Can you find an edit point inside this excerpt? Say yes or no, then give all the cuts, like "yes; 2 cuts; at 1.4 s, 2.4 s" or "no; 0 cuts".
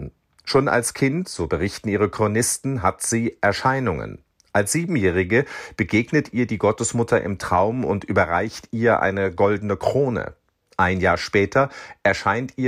no; 0 cuts